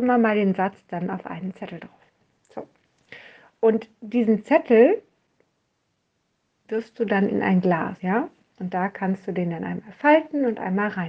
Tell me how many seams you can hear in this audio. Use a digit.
1